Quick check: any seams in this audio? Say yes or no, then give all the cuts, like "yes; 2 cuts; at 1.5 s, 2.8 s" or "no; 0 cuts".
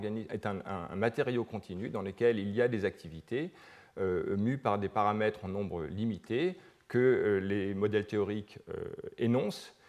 no; 0 cuts